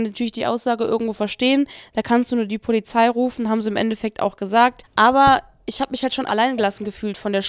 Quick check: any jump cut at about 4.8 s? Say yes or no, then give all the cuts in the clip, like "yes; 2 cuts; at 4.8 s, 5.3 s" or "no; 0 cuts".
yes; 2 cuts; at 4.8 s, 6.3 s